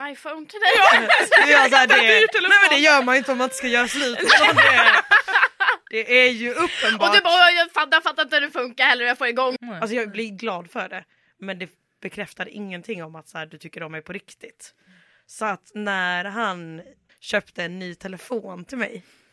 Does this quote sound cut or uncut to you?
cut